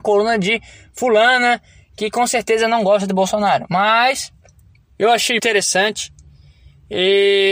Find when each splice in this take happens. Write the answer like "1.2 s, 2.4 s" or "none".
5.4 s